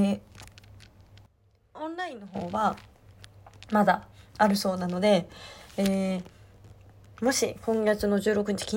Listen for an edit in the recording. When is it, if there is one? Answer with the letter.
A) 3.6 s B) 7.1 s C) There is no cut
C